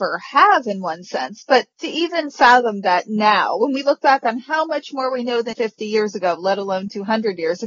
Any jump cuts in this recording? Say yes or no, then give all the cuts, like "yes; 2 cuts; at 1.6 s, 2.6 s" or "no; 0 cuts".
yes; 2 cuts; at 1.7 s, 5.5 s